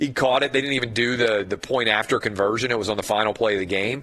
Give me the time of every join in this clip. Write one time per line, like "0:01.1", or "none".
none